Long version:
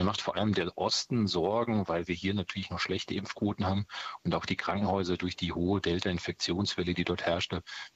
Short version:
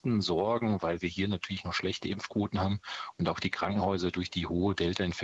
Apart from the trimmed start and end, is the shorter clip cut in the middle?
no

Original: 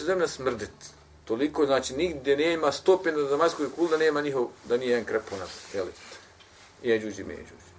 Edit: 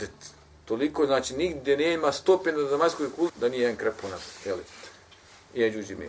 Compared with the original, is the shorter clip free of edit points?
no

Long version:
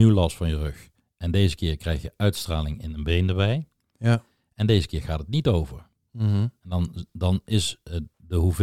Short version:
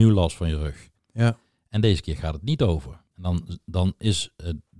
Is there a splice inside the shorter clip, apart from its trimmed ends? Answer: yes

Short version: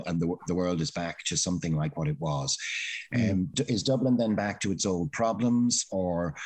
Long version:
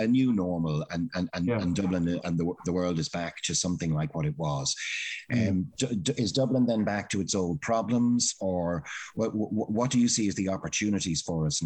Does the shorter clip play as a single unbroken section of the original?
no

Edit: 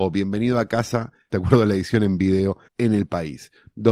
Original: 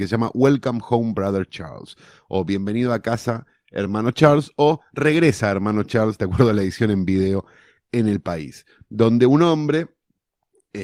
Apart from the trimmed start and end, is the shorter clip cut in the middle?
yes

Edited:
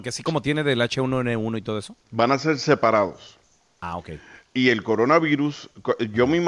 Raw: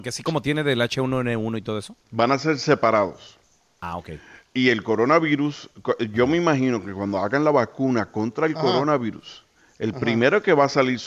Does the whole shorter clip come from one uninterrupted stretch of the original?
yes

